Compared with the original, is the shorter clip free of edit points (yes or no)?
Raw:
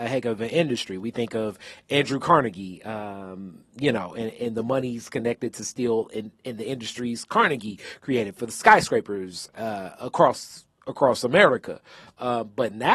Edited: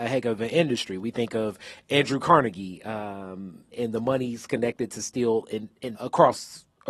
no